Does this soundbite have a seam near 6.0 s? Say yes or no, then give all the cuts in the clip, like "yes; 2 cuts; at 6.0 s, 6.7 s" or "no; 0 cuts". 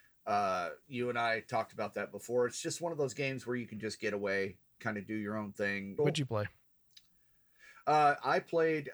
yes; 1 cut; at 6.0 s